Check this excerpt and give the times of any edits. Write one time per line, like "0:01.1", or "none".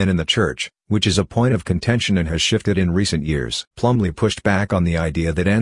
0:03.7